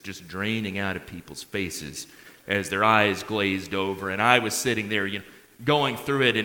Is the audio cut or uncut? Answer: uncut